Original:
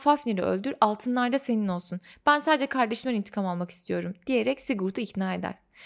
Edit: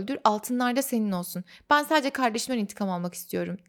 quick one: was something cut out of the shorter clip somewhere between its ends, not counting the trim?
no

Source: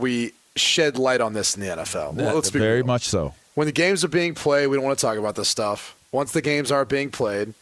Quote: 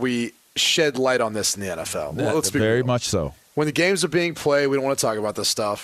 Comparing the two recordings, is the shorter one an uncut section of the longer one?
yes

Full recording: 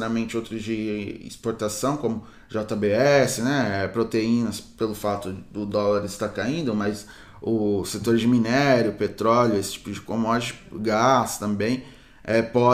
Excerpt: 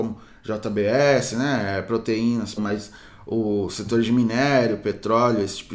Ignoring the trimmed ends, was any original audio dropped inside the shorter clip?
yes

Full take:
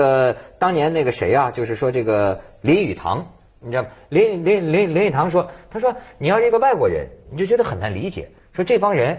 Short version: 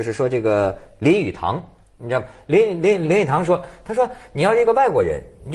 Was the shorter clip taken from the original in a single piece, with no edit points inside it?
no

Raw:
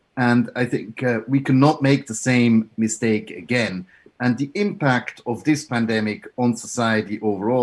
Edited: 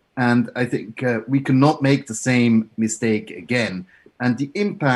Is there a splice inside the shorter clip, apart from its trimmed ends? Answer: no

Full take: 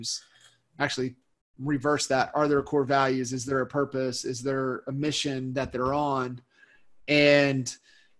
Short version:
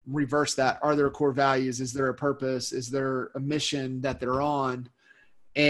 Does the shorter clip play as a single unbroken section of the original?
yes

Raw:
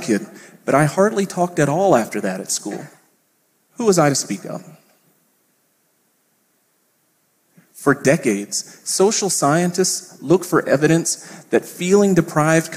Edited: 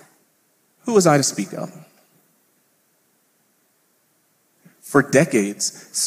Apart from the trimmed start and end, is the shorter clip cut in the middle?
no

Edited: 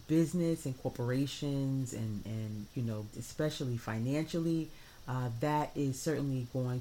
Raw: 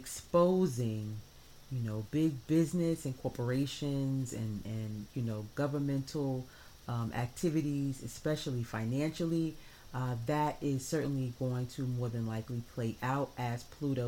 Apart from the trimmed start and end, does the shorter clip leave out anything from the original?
yes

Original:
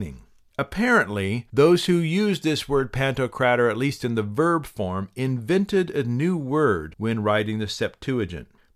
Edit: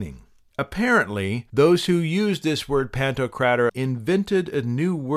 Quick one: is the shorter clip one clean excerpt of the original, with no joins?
no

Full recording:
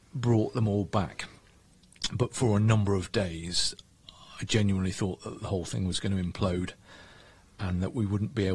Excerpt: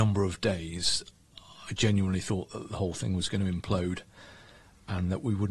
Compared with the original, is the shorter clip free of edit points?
yes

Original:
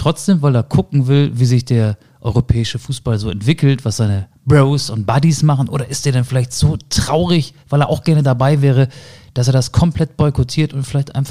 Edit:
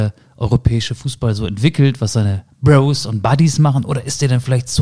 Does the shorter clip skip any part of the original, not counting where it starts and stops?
no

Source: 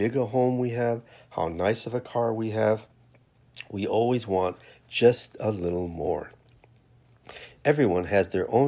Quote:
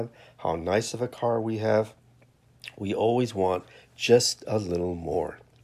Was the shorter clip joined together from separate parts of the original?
no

